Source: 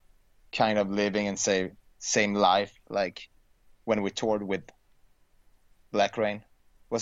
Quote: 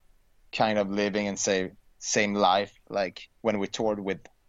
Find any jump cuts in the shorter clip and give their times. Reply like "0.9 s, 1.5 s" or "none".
3.3 s